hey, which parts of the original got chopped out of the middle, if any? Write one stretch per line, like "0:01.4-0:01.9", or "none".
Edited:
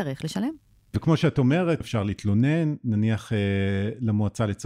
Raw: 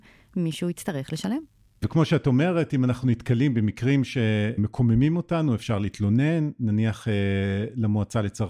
0:02.7-0:05.6